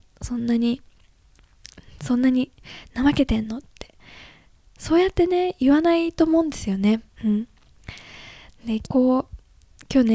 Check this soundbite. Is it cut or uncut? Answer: cut